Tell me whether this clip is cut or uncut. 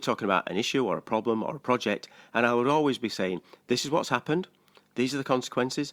uncut